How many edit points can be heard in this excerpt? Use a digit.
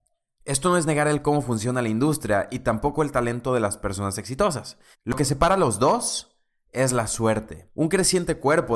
1